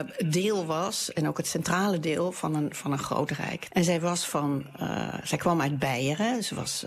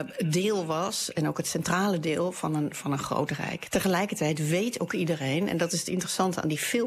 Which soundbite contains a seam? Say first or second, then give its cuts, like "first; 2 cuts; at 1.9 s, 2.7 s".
first; 1 cut; at 3.7 s